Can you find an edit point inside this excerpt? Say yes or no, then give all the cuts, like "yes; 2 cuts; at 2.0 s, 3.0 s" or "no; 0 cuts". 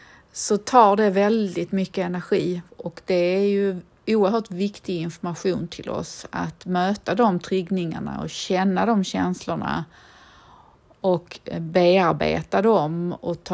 yes; 1 cut; at 2.7 s